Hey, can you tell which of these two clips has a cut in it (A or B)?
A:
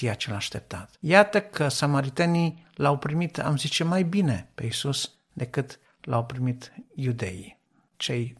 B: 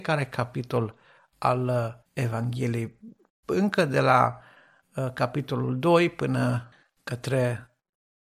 B